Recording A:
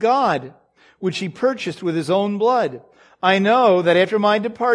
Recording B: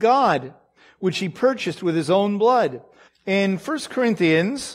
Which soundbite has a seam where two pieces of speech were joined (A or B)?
B